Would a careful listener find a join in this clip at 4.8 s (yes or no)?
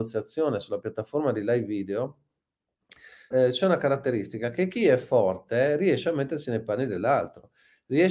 no